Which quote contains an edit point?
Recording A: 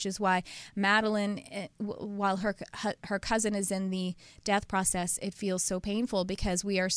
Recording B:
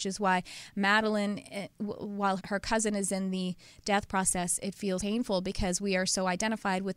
B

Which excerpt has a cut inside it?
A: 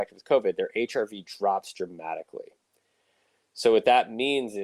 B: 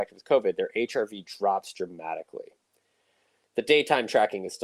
B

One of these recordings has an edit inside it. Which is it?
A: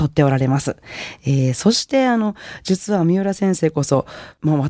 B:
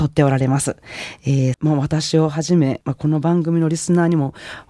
B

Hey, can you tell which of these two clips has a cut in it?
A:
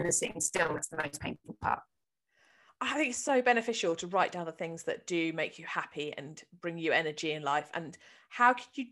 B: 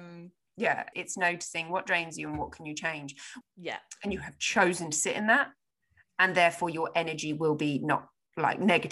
B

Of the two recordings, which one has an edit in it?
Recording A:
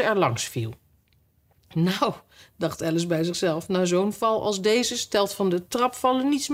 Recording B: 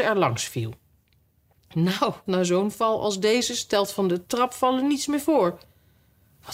B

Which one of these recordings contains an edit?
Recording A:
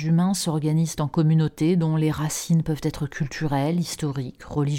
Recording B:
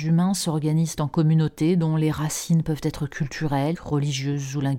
B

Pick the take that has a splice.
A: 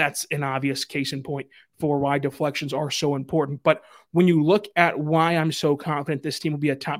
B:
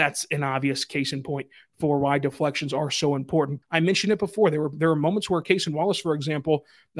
B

